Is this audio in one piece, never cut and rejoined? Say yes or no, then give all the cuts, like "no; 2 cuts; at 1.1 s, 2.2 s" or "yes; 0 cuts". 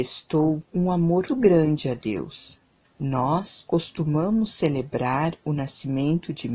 no; 2 cuts; at 1.3 s, 2.8 s